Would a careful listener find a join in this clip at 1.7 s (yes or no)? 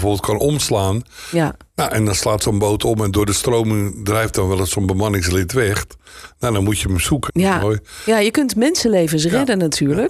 no